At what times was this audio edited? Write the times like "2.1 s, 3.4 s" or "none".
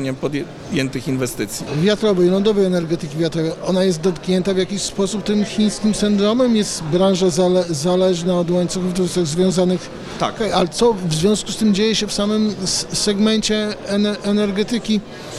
1.7 s, 10.4 s